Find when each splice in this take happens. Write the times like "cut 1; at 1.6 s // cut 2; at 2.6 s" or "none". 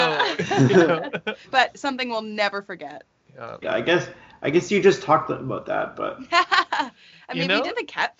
cut 1; at 3.6 s